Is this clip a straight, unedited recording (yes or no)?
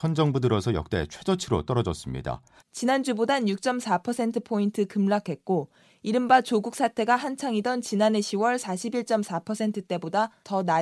no